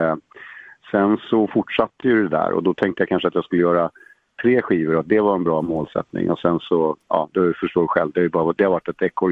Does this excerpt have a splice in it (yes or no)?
no